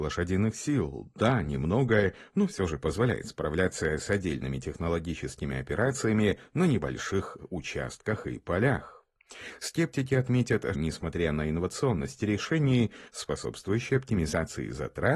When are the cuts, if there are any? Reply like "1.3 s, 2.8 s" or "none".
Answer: 10.7 s, 13.1 s